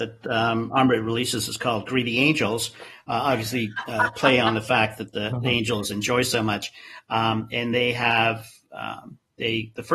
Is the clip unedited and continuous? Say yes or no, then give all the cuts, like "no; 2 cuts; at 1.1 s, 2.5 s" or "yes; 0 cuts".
yes; 0 cuts